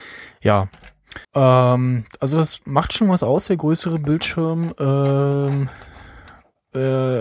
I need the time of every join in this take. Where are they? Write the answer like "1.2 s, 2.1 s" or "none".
1.2 s